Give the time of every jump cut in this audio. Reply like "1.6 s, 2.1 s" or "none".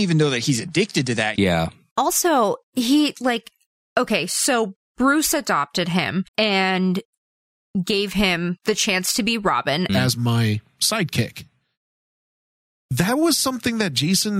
1.4 s, 6.3 s, 9.9 s